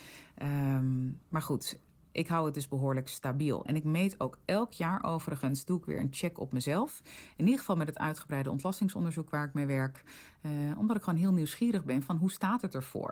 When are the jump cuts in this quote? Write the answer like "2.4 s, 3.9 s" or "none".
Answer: none